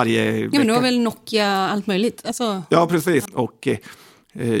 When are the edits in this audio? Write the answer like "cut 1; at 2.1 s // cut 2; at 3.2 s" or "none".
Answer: cut 1; at 3.3 s